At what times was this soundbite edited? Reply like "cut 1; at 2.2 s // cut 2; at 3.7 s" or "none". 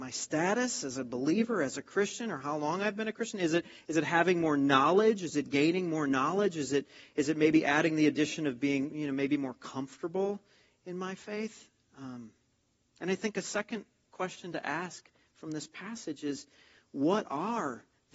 none

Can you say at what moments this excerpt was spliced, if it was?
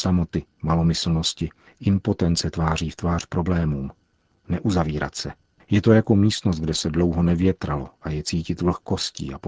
cut 1; at 5.6 s

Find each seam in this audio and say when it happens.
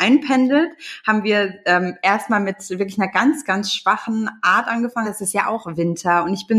cut 1; at 5.0 s

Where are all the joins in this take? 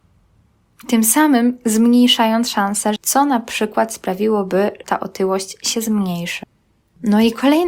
cut 1; at 3.0 s // cut 2; at 4.8 s

